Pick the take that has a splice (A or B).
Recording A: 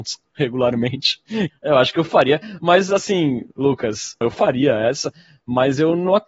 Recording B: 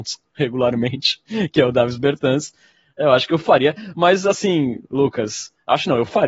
A